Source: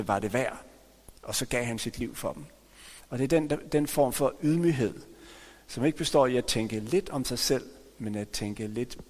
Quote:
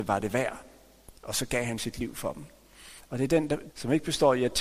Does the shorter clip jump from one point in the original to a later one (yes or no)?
yes